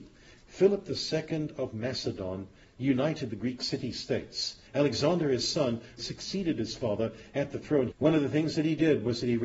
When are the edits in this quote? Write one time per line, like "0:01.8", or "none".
0:04.7
0:06.0
0:07.9